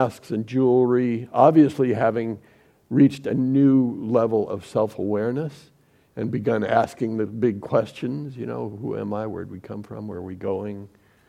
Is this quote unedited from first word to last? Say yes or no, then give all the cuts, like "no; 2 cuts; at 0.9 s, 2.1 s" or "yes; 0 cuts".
yes; 0 cuts